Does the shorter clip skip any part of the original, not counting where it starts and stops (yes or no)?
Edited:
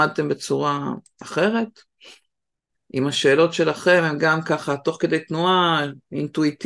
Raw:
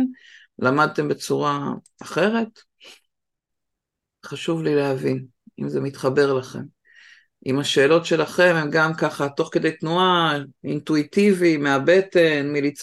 yes